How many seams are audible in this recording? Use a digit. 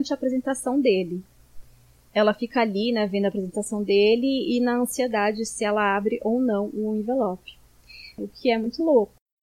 1